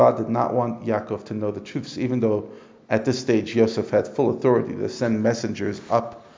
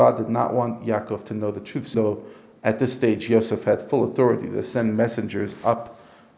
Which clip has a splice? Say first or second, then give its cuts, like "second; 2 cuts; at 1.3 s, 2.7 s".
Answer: second; 1 cut; at 1.9 s